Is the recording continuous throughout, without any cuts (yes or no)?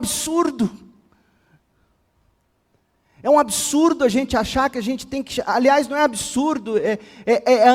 yes